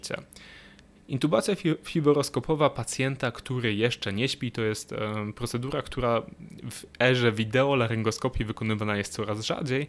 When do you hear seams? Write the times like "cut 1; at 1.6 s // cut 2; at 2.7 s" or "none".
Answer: cut 1; at 0.9 s